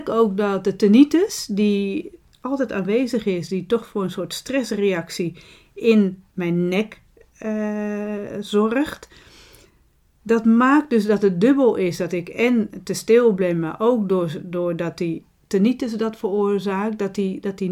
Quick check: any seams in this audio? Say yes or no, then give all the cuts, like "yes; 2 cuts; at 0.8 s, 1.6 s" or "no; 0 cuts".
no; 0 cuts